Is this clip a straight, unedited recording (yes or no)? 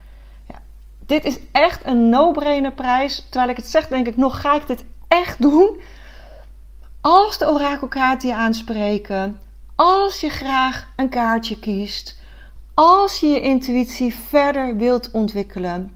yes